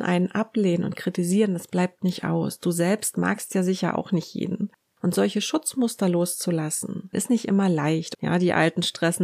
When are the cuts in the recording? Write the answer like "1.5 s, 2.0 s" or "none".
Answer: 5.0 s, 7.1 s, 8.1 s